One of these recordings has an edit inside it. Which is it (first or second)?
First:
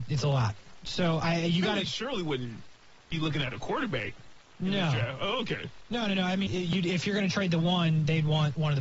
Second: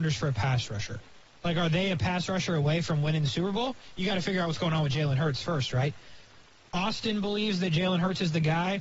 first